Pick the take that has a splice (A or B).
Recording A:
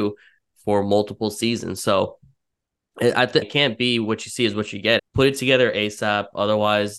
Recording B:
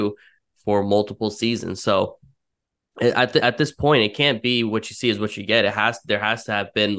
A